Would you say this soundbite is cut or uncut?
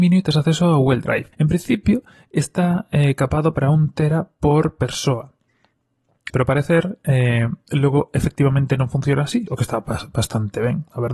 cut